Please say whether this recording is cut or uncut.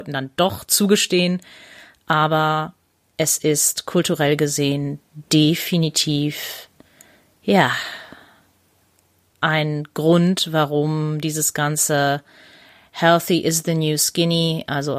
uncut